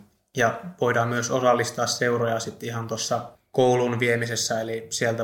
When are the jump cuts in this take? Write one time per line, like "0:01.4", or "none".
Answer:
none